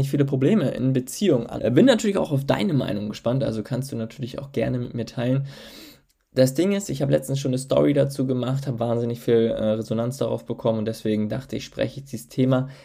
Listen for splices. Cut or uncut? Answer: cut